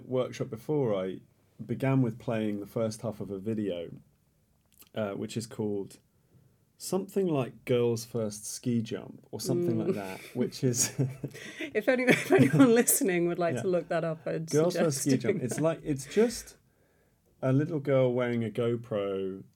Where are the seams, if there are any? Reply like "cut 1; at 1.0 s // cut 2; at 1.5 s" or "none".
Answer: none